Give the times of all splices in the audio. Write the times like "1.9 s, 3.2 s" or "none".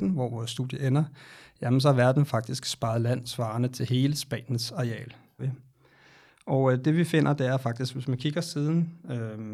5.4 s